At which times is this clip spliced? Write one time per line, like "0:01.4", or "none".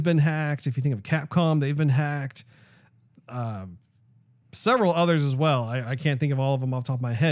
none